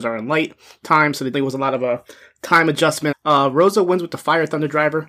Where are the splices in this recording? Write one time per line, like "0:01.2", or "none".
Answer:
0:01.3
0:03.1